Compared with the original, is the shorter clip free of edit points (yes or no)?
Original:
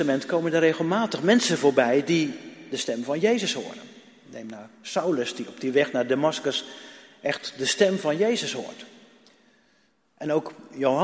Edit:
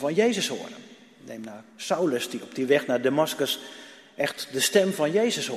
yes